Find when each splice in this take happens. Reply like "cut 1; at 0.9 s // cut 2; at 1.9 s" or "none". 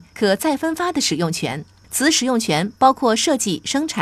none